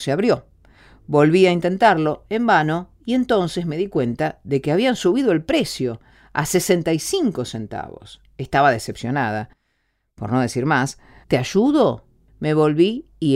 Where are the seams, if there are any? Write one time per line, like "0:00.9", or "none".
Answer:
0:11.2